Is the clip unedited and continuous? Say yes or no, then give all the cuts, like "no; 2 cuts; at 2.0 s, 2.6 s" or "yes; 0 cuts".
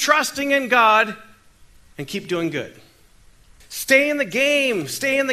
no; 1 cut; at 3.6 s